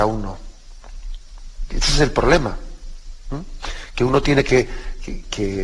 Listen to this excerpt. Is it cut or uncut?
uncut